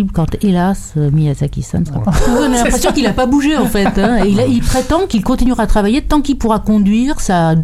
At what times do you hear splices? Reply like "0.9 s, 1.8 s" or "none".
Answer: 2.0 s